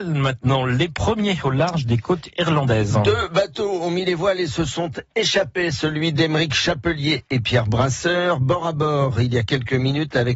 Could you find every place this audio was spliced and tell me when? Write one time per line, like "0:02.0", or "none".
none